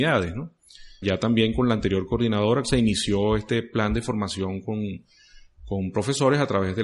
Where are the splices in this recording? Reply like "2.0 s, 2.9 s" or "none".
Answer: 1.0 s, 2.6 s